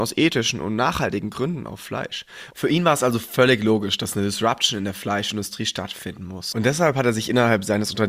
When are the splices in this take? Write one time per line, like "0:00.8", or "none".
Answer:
0:02.5